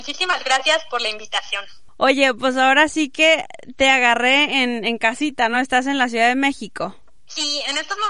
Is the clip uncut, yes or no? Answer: yes